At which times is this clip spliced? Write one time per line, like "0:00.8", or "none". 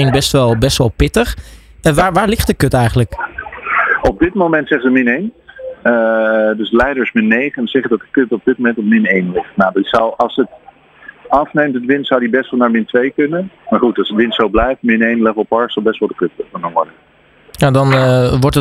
0:13.6